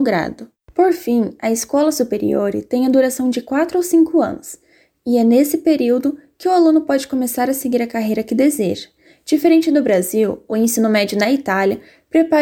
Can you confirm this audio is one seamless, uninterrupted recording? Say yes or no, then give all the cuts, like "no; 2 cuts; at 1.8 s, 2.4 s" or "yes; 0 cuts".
yes; 0 cuts